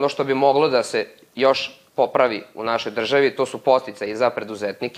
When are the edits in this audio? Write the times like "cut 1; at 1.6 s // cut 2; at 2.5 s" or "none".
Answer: cut 1; at 1.9 s